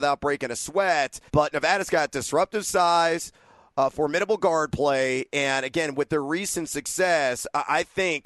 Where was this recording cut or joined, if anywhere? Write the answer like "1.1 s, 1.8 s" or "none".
1.3 s